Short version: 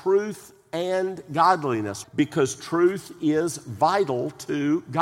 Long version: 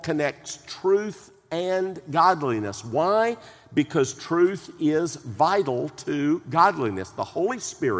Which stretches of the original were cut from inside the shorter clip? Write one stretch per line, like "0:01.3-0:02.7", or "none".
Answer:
0:02.8-0:03.6